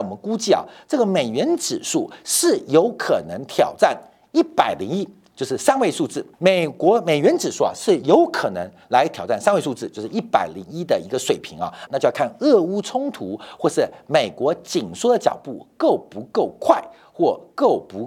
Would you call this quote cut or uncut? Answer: cut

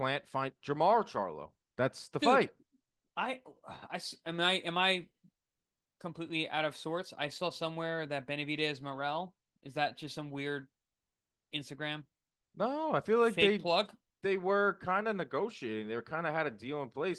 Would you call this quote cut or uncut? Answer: uncut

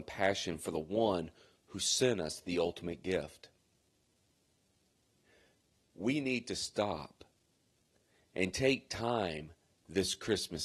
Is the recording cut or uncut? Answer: uncut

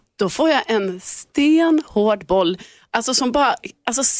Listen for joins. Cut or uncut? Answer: uncut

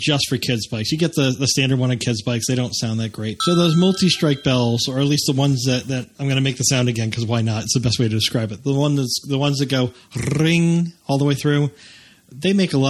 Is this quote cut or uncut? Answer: cut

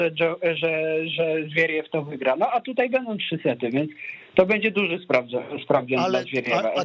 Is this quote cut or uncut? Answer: uncut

